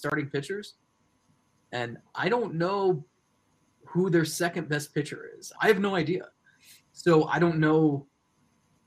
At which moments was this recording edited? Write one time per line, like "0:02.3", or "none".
0:05.5